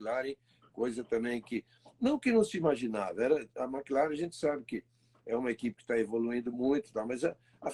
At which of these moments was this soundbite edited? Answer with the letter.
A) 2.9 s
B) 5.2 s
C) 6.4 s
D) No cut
D